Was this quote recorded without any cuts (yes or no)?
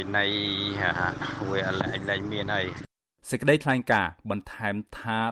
yes